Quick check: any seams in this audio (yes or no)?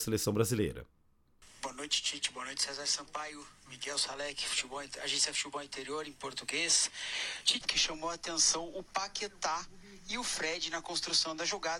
yes